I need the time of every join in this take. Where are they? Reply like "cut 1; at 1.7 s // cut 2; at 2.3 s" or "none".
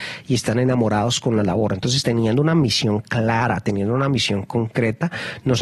none